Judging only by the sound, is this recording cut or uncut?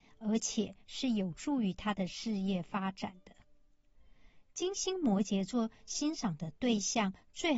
uncut